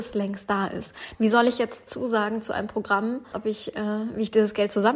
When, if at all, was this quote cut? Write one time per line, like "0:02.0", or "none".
0:01.2
0:03.3